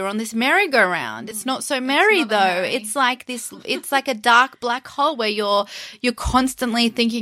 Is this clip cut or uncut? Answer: uncut